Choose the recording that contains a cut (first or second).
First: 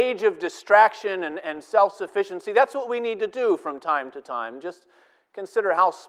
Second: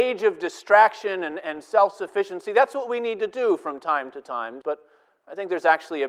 second